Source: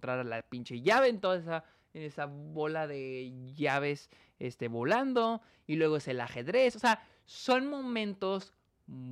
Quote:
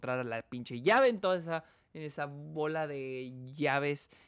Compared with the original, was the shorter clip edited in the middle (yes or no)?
no